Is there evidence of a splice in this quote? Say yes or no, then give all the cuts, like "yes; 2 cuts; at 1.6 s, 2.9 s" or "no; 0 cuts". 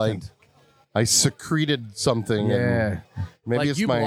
yes; 1 cut; at 3.1 s